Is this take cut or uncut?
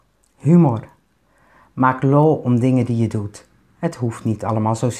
uncut